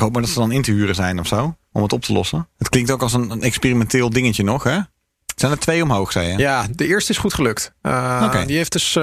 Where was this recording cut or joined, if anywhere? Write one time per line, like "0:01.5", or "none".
0:02.5